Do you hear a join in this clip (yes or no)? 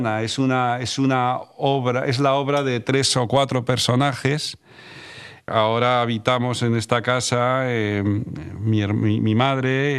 yes